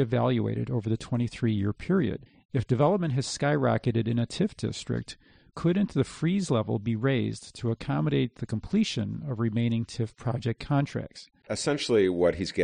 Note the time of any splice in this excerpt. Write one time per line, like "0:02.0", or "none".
0:11.4